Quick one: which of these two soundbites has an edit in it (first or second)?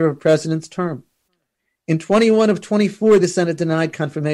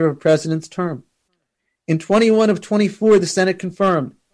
first